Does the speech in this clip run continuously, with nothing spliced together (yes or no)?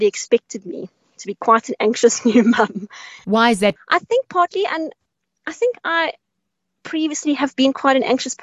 no